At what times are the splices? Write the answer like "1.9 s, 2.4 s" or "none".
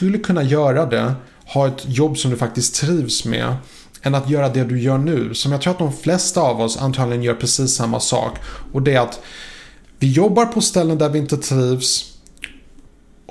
none